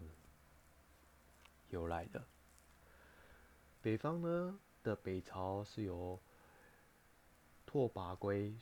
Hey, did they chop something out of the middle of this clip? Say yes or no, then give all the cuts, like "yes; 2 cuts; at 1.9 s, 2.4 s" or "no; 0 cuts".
yes; 1 cut; at 3.8 s